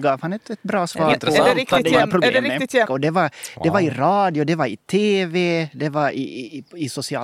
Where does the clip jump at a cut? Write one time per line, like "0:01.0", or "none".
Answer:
0:02.9